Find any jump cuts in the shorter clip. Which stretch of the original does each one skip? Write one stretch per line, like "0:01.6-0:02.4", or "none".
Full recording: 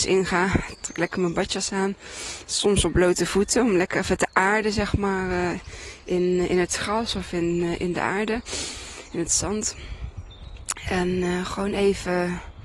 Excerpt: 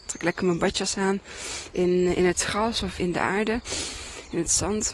0:02.4-0:06.0
0:07.3-0:07.8